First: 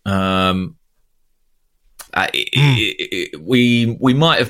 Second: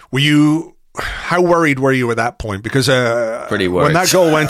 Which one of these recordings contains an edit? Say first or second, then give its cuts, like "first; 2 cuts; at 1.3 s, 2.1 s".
first; 1 cut; at 2.1 s